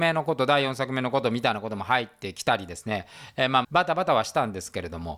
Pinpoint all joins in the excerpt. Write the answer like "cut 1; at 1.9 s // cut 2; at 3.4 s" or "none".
cut 1; at 3.6 s